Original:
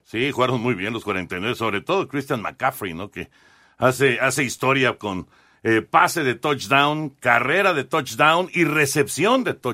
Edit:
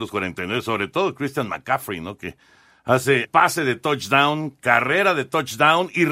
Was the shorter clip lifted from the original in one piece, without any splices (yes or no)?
no